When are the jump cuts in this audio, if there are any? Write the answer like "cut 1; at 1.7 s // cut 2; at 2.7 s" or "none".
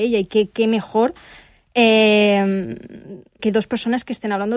cut 1; at 3.4 s